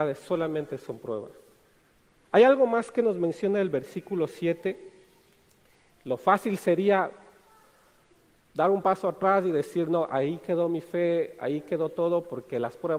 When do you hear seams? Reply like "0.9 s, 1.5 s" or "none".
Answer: 2.2 s, 5.9 s